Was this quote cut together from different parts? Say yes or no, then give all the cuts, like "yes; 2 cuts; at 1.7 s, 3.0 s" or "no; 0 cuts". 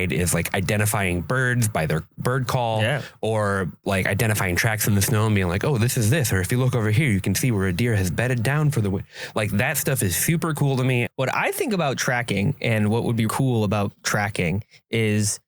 yes; 2 cuts; at 11.1 s, 13.3 s